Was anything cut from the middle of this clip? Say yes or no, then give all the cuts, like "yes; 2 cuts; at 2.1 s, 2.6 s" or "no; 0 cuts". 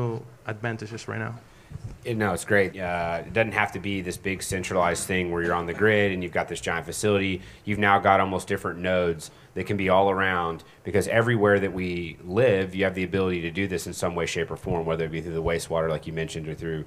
yes; 1 cut; at 2.7 s